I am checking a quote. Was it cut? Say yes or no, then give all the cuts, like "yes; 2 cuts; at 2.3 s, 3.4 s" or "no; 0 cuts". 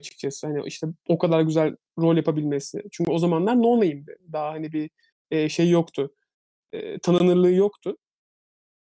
no; 0 cuts